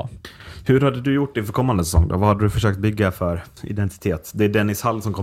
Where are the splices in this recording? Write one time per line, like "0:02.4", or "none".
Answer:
none